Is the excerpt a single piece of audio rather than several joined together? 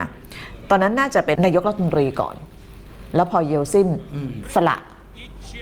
no; 1 cut; at 1.4 s

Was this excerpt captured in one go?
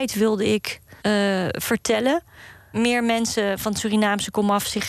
no; 2 cuts; at 1.0 s, 2.7 s

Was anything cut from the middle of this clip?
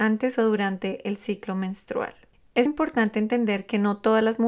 yes; 1 cut; at 2.7 s

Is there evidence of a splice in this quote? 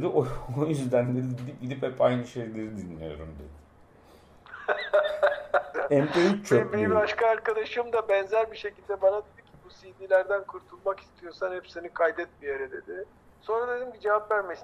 yes; 2 cuts; at 5.7 s, 13.2 s

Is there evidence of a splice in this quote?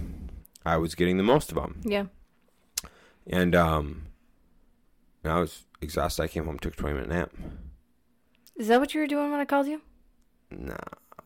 no; 0 cuts

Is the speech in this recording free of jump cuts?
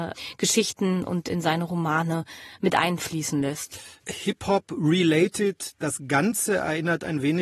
yes; 0 cuts

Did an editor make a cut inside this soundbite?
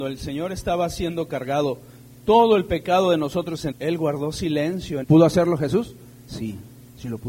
yes; 2 cuts; at 3.7 s, 5.0 s

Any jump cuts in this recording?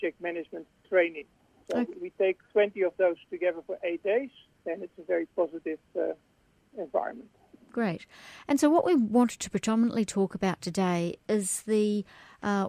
yes; 1 cut; at 4.5 s

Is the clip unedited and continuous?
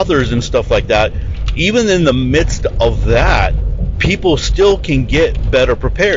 yes; 0 cuts

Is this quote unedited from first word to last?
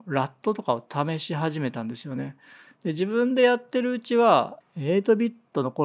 no; 1 cut; at 2.6 s

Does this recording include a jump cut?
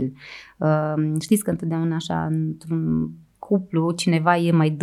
no; 0 cuts

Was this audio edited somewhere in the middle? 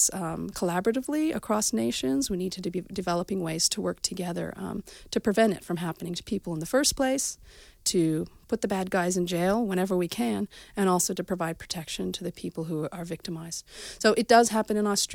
no; 0 cuts

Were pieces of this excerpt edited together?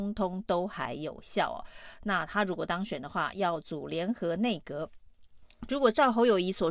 no; 0 cuts

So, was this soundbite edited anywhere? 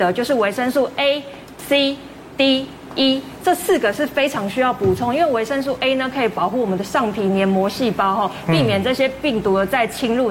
no; 0 cuts

